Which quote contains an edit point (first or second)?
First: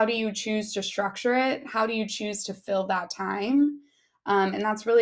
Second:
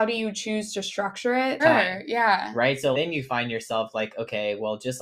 second